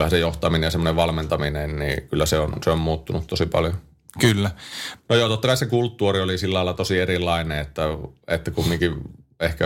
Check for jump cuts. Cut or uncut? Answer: cut